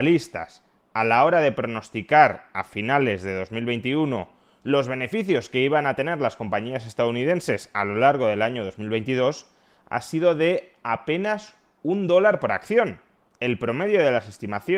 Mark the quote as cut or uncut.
uncut